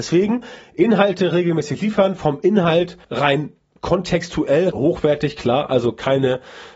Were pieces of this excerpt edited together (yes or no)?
yes